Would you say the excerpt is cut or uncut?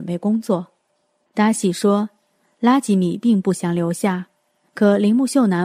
cut